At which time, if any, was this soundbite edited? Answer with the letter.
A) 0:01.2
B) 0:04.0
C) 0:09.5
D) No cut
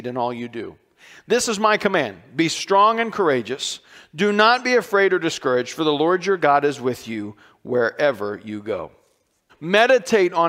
C